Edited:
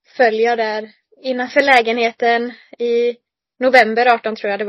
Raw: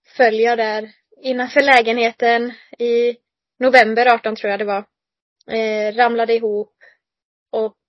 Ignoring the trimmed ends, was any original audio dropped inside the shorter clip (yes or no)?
no